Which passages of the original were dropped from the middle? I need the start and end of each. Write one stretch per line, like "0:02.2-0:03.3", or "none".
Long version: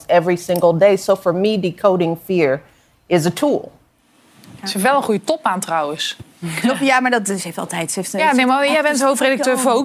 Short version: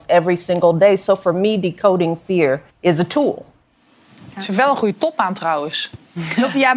0:02.7-0:03.0